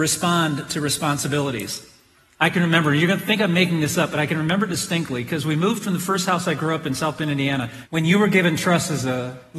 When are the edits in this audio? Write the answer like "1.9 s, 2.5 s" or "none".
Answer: 7.9 s